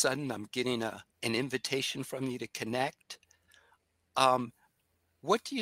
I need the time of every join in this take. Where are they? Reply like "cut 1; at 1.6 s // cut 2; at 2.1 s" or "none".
cut 1; at 1.1 s